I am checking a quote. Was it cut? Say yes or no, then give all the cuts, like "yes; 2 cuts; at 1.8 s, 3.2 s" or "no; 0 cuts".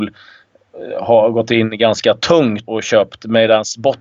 yes; 1 cut; at 2.7 s